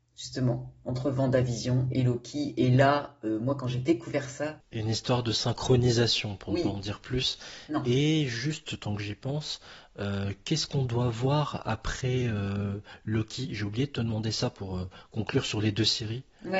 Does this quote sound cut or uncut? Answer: uncut